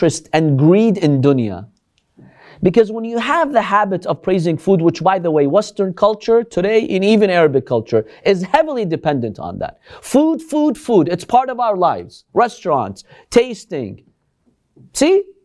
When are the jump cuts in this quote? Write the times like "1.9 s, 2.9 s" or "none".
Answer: none